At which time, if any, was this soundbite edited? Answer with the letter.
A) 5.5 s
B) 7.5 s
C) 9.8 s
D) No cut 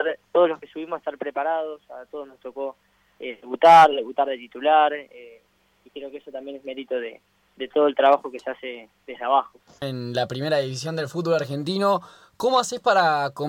C